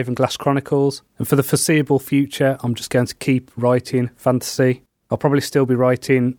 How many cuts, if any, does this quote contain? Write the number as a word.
one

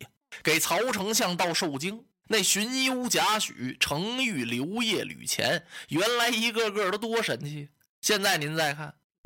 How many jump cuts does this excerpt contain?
one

